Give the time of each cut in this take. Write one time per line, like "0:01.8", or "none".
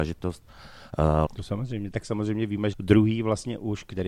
0:01.2
0:02.7

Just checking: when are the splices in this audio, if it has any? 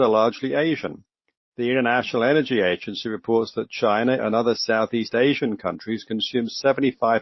0:04.2

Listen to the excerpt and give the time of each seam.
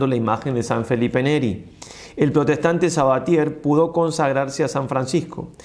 none

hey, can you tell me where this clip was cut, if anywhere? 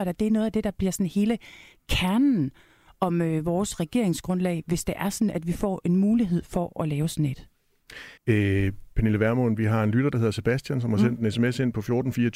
0:08.2

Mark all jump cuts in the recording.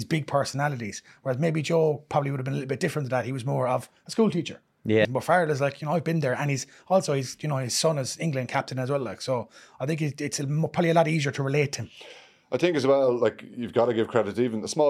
0:05.0

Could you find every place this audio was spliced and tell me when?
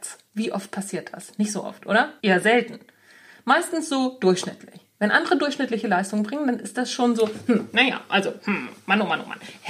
0:02.2

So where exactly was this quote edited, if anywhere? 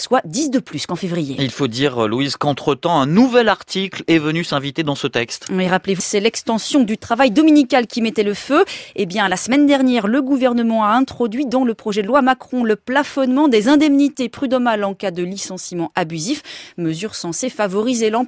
0:06.0

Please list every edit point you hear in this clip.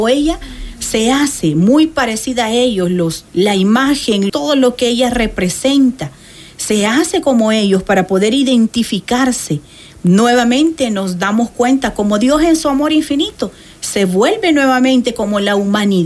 0:03.3
0:04.3

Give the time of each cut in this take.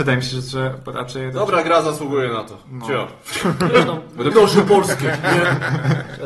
0:04.3

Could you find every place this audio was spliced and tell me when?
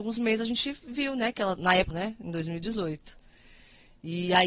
0:01.9

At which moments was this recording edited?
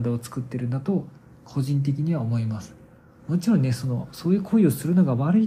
none

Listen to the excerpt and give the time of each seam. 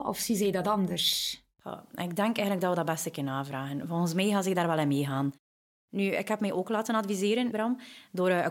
0:07.5

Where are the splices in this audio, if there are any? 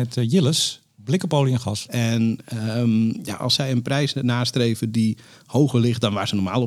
0:01.9

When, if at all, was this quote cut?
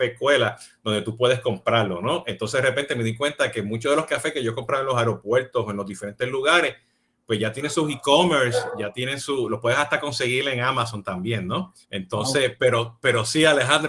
0:11.8

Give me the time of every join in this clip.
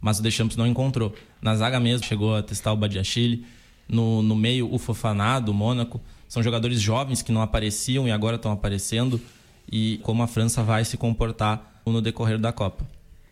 0:02.0
0:10.0
0:11.9

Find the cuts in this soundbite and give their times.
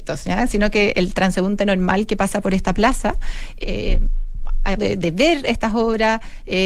0:03.6
0:04.8

